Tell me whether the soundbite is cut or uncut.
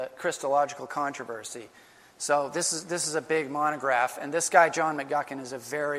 uncut